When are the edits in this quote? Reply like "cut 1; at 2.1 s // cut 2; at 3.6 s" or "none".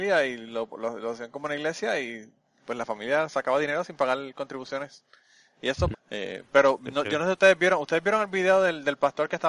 cut 1; at 5.9 s